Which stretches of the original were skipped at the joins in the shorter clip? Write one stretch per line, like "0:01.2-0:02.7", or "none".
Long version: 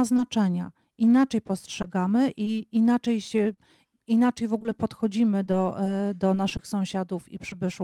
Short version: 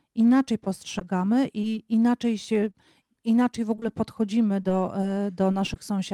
none